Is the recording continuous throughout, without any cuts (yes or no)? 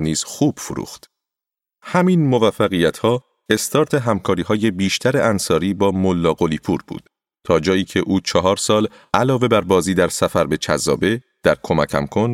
yes